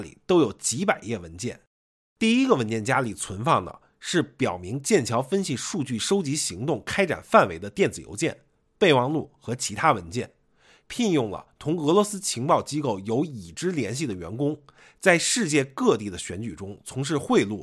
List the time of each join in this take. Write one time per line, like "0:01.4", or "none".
0:10.8